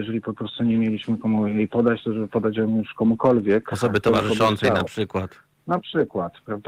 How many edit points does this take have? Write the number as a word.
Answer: zero